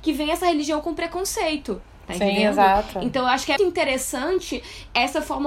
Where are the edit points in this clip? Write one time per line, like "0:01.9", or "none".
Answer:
0:03.6